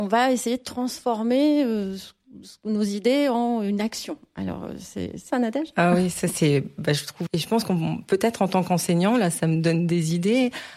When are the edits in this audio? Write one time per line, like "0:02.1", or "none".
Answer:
0:05.3
0:07.3